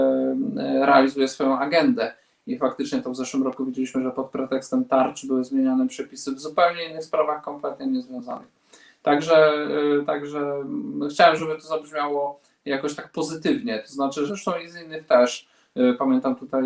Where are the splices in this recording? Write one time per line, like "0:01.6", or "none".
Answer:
0:14.3